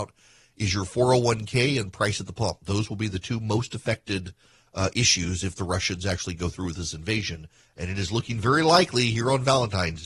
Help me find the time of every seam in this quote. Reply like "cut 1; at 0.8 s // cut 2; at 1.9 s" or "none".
none